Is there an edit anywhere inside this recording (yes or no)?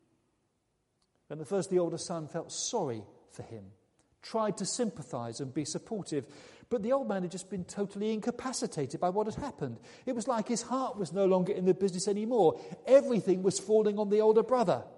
no